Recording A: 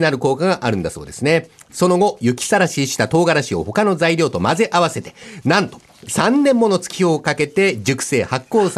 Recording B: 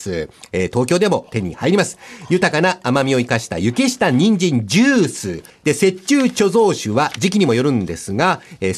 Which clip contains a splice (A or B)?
B